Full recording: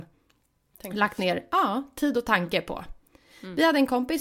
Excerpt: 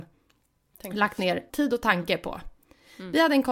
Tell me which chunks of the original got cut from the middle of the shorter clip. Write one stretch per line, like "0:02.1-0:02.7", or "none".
0:01.5-0:01.9